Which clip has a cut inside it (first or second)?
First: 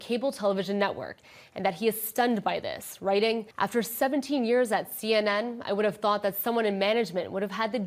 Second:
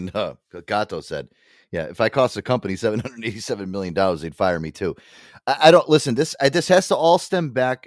first